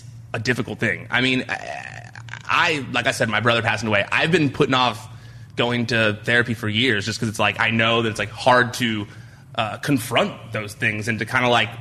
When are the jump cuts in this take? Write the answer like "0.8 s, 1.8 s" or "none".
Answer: none